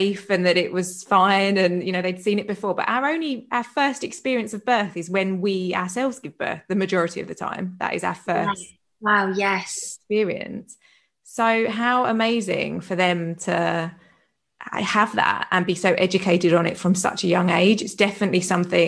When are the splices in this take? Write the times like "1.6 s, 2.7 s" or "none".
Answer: none